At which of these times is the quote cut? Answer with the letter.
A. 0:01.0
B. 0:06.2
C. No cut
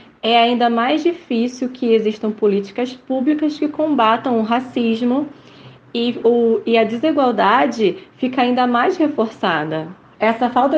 B